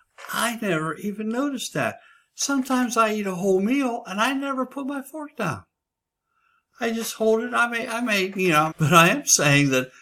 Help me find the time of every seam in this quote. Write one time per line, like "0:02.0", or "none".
0:08.7